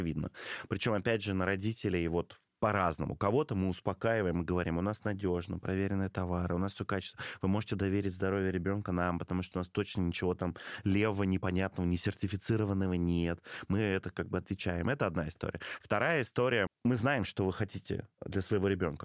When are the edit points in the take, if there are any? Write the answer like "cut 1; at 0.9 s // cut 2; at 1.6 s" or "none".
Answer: cut 1; at 16.7 s

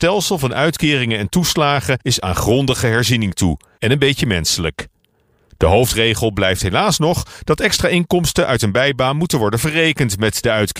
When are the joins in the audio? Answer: cut 1; at 3.8 s

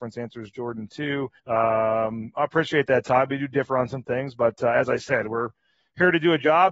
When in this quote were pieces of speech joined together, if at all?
cut 1; at 1.4 s

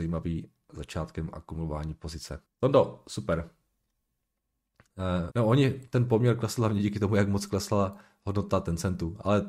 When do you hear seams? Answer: cut 1; at 2.5 s // cut 2; at 5.3 s

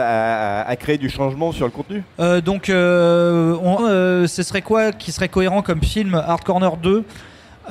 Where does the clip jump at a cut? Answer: cut 1; at 2.1 s // cut 2; at 3.8 s

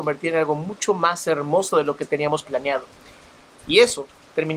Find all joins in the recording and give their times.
none

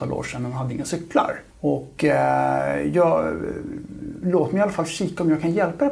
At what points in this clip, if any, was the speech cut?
cut 1; at 1.5 s // cut 2; at 4.2 s

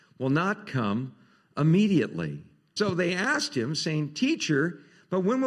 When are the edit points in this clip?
cut 1; at 2.8 s

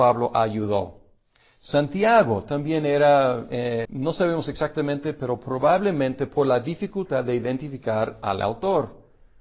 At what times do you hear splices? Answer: cut 1; at 3.8 s

